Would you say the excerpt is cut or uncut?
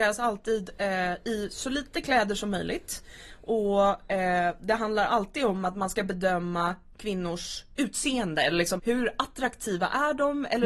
cut